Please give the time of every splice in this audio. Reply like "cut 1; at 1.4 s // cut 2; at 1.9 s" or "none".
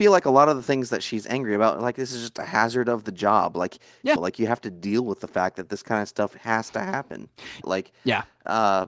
cut 1; at 4.2 s // cut 2; at 7.6 s